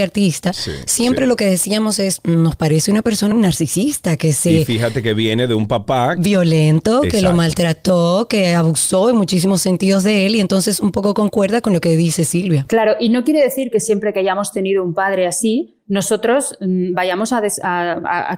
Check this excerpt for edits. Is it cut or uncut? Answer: cut